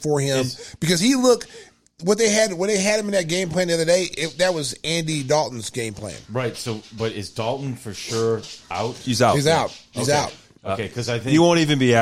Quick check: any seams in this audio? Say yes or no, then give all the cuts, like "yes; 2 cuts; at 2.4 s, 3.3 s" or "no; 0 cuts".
no; 0 cuts